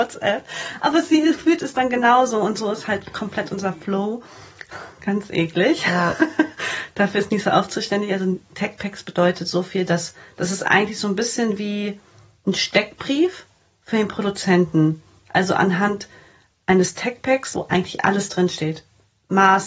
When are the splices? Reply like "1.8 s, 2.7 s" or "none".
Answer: 4.7 s, 17.5 s